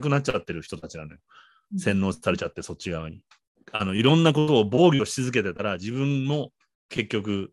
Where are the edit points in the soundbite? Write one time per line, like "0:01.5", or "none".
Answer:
none